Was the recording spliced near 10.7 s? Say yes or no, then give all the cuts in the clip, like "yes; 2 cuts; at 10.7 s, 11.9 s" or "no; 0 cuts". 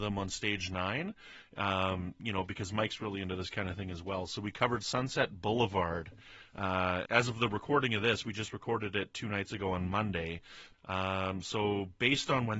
yes; 2 cuts; at 7.0 s, 10.7 s